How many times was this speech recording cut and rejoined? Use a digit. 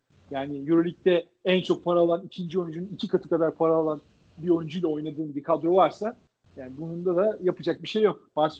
0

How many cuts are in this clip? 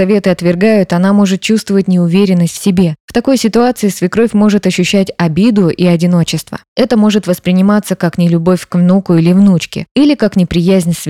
2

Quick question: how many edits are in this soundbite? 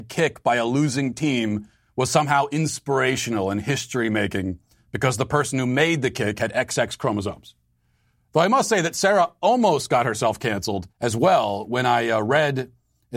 1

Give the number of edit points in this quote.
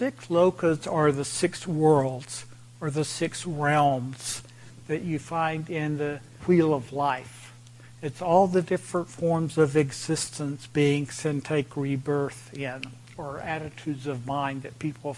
1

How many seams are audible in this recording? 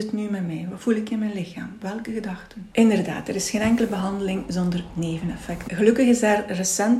2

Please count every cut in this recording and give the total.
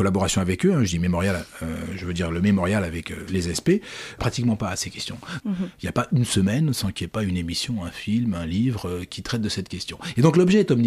2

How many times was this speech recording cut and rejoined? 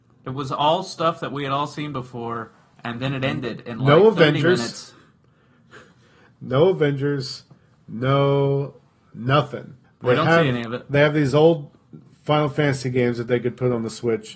1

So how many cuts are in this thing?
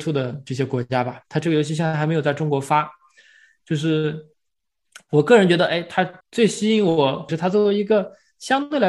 2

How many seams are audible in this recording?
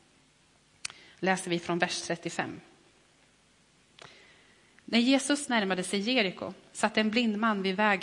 0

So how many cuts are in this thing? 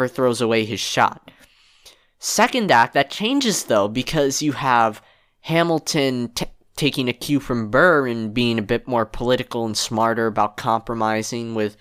0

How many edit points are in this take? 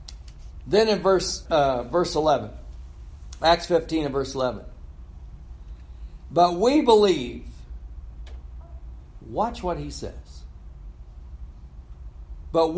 1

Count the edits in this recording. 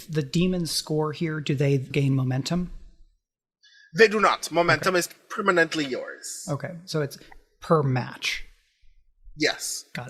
1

